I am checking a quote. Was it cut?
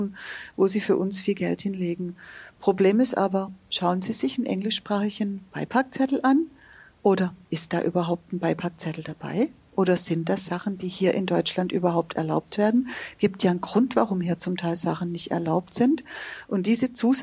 no; 0 cuts

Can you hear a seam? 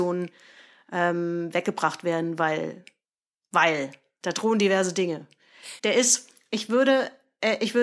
yes; 1 cut; at 5.8 s

